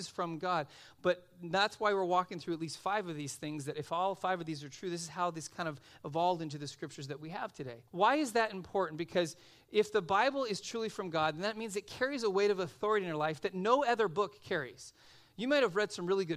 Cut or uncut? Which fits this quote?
cut